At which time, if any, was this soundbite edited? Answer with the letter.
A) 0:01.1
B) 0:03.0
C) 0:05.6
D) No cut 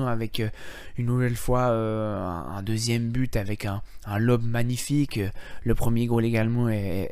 D